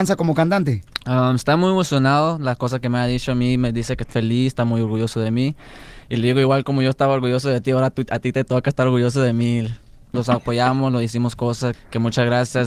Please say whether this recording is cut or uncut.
cut